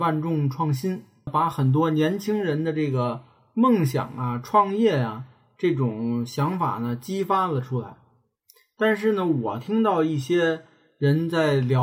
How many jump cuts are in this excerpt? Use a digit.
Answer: 1